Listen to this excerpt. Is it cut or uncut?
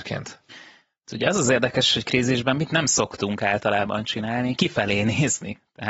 uncut